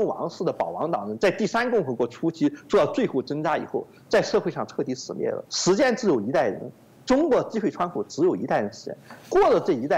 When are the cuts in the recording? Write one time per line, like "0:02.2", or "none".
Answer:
0:05.5